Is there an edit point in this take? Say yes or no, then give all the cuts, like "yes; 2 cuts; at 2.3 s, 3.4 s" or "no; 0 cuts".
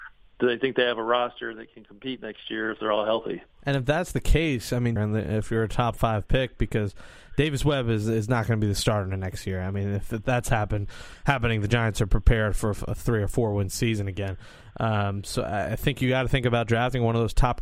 yes; 1 cut; at 5.0 s